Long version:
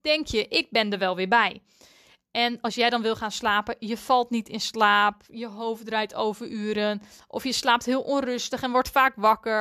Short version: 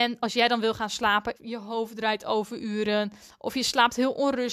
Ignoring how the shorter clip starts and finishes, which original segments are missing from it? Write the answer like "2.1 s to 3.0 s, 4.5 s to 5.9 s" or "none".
3.8 s to 5.3 s

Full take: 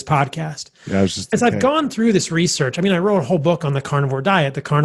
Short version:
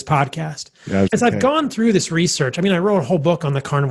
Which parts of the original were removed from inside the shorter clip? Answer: 1.1 s to 1.3 s

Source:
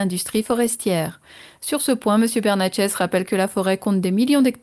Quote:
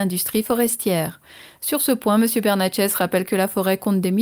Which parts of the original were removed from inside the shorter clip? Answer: none

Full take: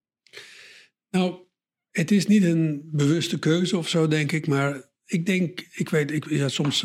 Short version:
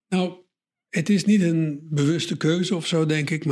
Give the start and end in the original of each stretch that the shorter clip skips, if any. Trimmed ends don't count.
none

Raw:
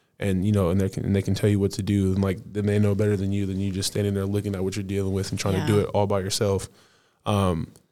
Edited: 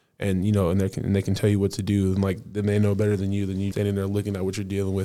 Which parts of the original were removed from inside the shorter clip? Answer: 3.7 s to 3.9 s

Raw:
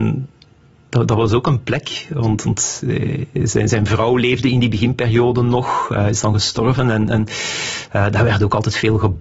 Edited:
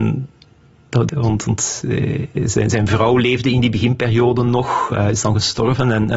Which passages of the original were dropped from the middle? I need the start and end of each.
1.1 s to 2.1 s

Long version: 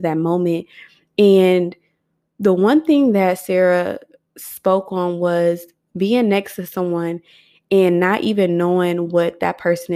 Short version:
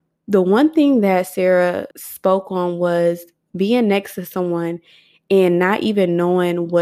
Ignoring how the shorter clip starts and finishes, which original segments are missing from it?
4.0 s to 4.3 s

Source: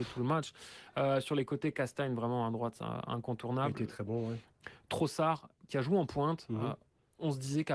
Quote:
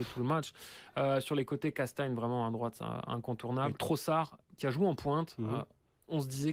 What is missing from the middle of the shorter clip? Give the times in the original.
3.7 s to 4.8 s

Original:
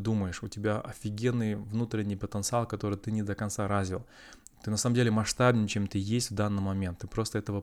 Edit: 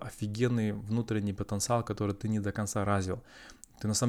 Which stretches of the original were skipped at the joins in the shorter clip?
none

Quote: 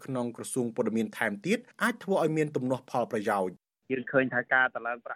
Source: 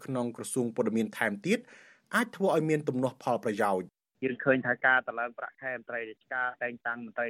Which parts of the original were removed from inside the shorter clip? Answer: 1.7 s to 2.0 s

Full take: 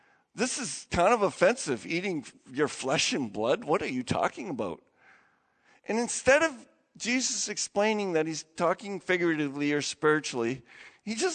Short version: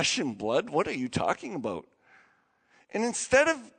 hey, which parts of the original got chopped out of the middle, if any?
none

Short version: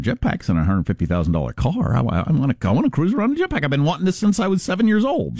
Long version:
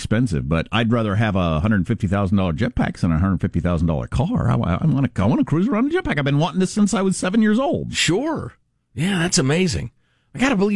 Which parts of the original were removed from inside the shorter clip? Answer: none

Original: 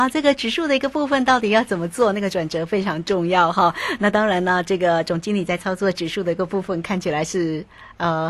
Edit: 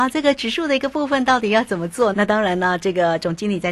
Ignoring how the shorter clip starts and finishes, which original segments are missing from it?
2.1 s to 4.0 s

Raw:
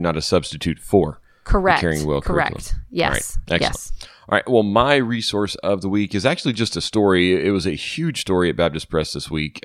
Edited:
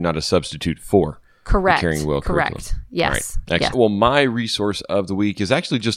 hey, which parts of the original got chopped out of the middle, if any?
3.7 s to 4.4 s

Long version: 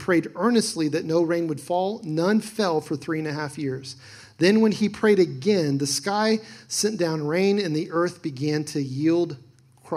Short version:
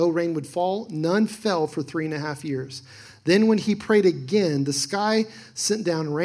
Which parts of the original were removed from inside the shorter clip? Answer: none

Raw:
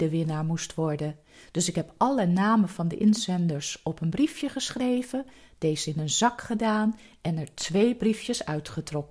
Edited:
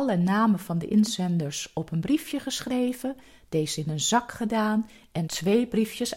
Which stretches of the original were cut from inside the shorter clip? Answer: 7.4 s to 7.5 s

